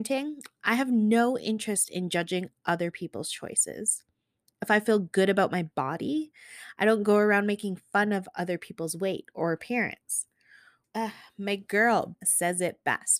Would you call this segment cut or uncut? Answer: cut